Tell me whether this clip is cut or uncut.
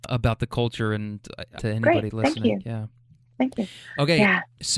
cut